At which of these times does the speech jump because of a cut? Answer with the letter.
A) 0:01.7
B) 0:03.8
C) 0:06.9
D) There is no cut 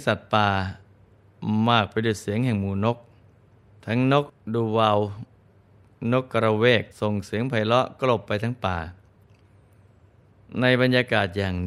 C